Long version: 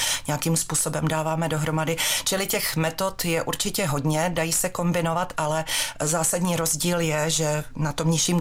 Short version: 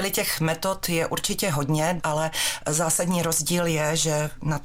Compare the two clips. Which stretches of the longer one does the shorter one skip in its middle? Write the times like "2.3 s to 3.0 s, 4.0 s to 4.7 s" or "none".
4.3 s to 5.3 s